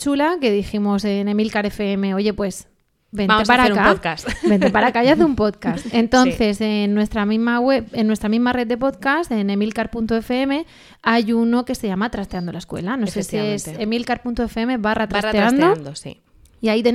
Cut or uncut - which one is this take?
uncut